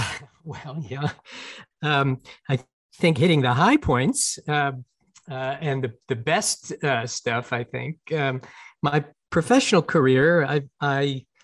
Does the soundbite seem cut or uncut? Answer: uncut